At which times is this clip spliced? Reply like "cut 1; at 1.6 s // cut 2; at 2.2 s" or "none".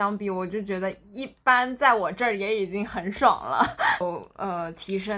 cut 1; at 4.0 s